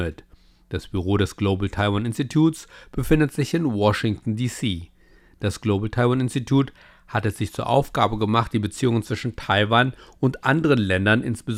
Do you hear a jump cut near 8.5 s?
no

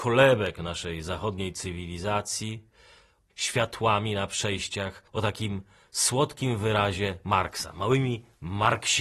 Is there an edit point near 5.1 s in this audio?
yes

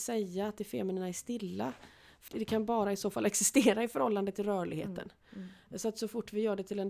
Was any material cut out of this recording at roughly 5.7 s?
no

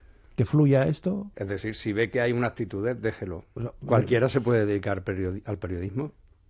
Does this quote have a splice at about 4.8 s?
no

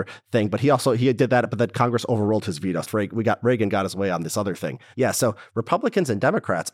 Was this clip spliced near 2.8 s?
yes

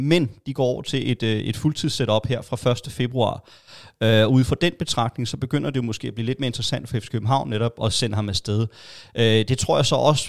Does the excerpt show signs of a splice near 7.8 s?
yes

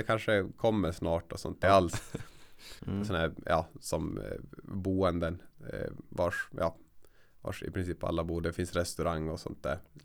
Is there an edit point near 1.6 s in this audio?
yes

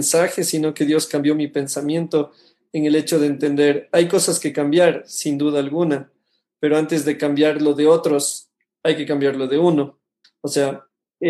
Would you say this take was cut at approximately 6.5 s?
no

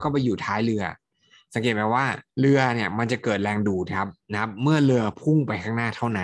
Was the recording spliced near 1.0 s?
no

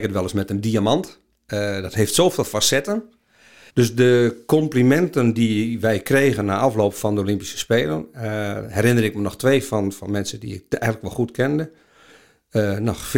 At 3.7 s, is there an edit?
yes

